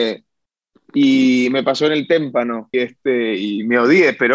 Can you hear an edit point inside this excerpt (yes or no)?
yes